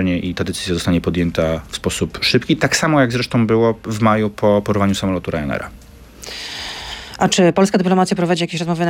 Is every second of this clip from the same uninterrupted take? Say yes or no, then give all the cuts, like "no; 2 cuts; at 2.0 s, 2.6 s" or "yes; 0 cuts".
yes; 0 cuts